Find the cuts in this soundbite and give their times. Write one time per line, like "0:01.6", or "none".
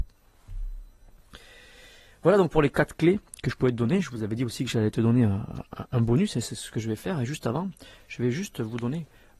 none